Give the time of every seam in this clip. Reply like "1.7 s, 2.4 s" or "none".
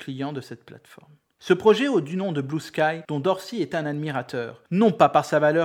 3.0 s